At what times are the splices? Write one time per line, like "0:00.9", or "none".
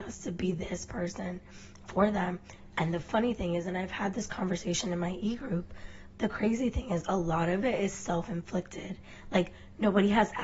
0:02.7
0:06.1